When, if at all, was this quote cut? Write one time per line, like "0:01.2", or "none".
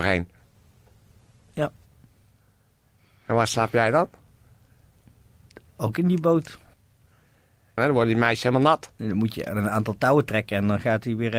0:07.8